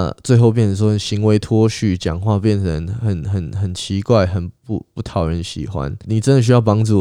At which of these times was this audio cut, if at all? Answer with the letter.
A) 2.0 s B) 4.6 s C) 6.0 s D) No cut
C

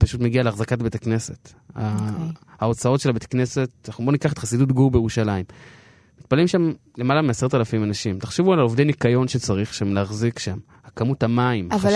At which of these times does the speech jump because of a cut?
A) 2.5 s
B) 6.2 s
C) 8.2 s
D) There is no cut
D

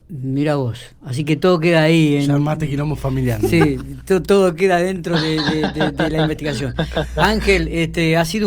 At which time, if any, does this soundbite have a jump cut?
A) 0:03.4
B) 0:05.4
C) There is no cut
C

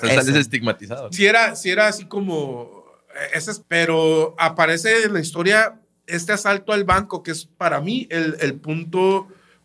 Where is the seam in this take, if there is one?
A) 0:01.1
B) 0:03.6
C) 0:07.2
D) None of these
B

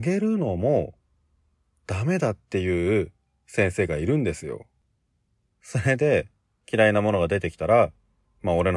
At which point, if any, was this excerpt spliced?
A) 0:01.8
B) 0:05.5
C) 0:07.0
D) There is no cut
B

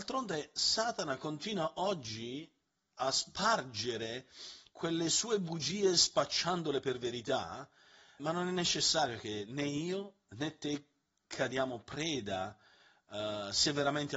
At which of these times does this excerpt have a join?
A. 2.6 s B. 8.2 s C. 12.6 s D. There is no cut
B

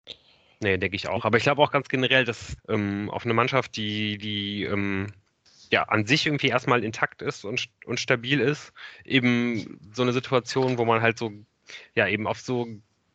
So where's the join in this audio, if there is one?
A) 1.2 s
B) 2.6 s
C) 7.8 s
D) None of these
B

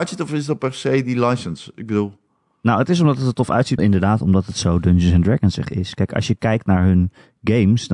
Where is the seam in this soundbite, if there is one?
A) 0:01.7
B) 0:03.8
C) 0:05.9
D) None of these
B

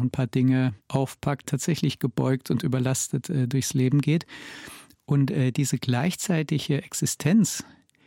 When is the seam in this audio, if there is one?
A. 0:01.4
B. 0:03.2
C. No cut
A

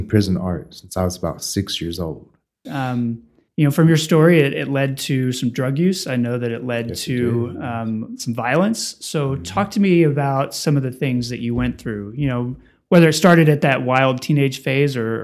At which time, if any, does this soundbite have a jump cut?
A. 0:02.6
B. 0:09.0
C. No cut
A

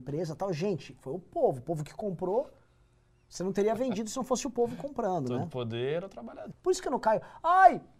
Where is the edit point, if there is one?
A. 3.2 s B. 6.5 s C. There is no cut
B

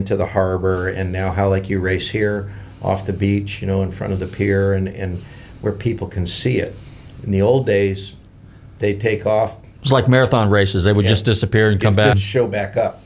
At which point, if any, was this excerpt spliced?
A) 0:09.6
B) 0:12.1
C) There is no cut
B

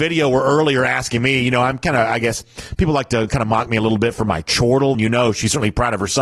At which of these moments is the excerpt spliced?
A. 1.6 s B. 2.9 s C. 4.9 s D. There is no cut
C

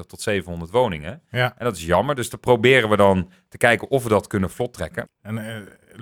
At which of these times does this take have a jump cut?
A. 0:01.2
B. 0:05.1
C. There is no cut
B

